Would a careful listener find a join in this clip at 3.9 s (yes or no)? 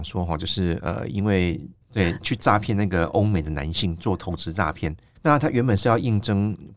no